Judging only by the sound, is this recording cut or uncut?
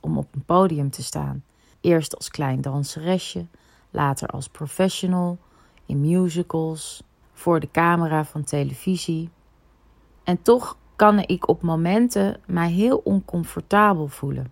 cut